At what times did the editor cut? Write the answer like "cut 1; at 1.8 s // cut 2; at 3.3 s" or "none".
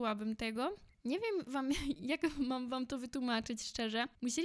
none